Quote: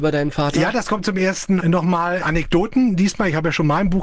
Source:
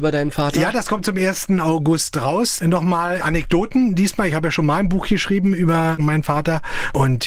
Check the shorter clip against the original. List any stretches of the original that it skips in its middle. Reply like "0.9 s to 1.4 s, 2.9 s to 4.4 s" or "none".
1.6 s to 2.6 s